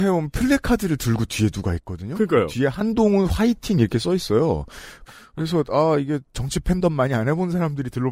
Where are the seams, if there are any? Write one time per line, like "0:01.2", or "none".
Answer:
0:05.1